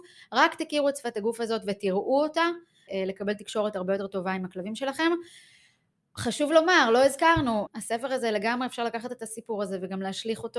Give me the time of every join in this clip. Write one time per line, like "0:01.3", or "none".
0:02.9
0:07.7